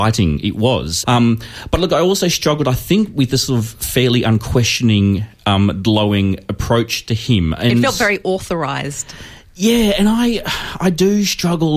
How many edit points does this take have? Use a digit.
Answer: 1